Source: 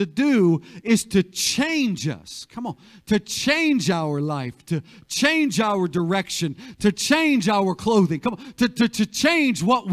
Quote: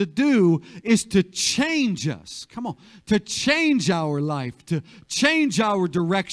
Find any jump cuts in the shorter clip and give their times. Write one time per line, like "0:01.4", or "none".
none